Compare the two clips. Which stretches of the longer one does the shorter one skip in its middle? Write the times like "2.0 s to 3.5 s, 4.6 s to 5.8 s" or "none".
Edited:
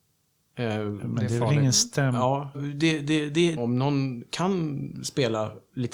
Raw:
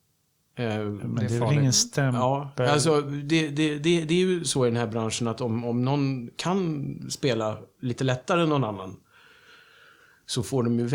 2.5 s to 3.0 s, 4.1 s to 5.6 s